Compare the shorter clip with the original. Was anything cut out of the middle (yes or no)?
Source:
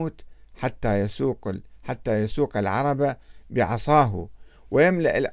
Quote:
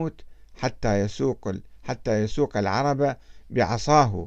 no